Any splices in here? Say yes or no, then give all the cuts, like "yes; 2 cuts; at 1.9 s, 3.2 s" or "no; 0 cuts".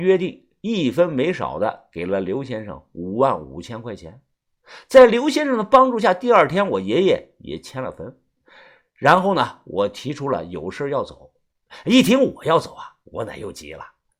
no; 0 cuts